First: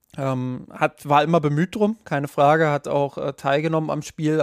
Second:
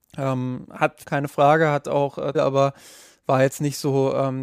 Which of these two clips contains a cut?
second; 2 cuts; at 1.0 s, 2.3 s

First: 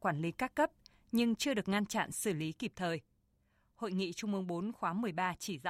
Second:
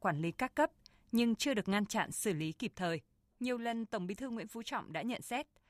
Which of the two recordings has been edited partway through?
second; 1 cut; at 3.3 s

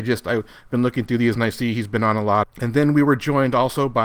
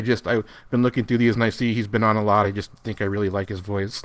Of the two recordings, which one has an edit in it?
first; 1 cut; at 2.4 s

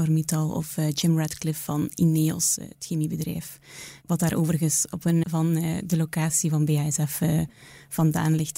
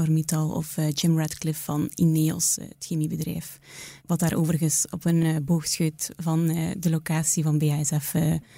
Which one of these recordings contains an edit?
first; 1 cut; at 5.2 s

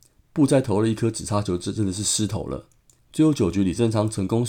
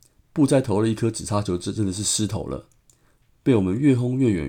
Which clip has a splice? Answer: first; 1 cut; at 3.0 s

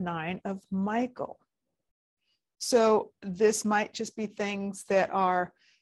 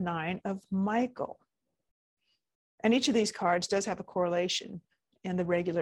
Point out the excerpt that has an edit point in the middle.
first; 1 cut; at 2.6 s

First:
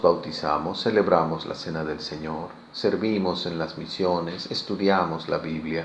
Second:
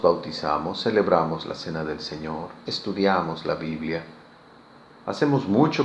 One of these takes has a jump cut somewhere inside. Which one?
second; 1 cut; at 2.7 s

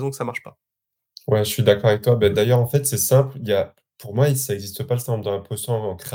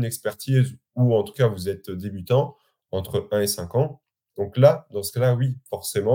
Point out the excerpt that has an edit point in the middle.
second; 1 cut; at 4.3 s

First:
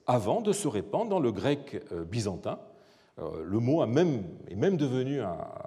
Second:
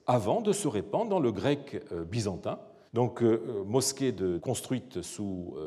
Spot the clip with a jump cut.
second; 2 cuts; at 2.9 s, 4.4 s

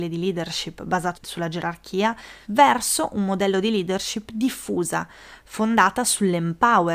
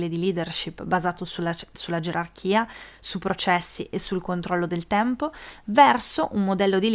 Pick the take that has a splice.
first; 2 cuts; at 1.1 s, 2.4 s

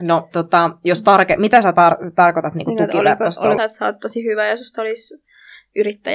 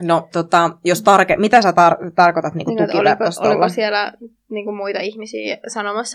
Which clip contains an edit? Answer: first; 1 cut; at 3.6 s

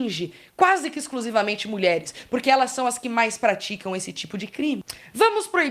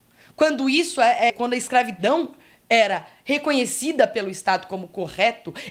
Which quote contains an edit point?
second; 1 cut; at 1.3 s

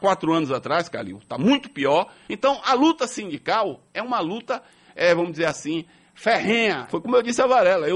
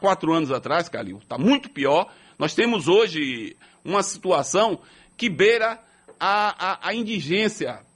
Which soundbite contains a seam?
first; 2 cuts; at 2.3 s, 6.9 s

